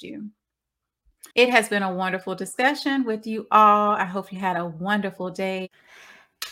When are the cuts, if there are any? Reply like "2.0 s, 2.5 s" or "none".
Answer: 1.3 s